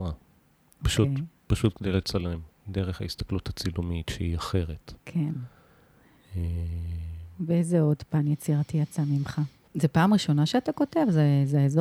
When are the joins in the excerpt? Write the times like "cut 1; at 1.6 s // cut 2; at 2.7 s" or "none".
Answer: cut 1; at 2.5 s // cut 2; at 9.7 s